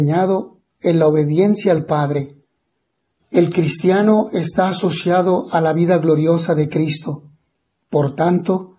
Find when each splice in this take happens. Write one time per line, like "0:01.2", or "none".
0:03.2